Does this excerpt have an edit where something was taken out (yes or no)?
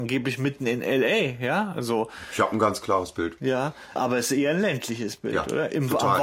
yes